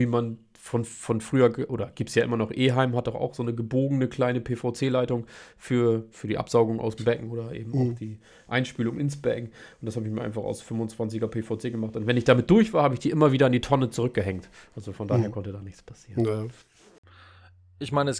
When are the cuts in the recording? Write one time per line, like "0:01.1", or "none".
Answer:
0:06.1